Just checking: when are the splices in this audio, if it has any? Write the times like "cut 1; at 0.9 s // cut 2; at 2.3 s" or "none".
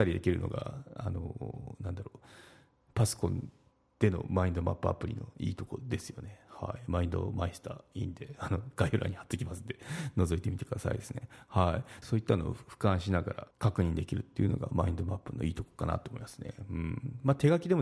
cut 1; at 12.0 s // cut 2; at 13.5 s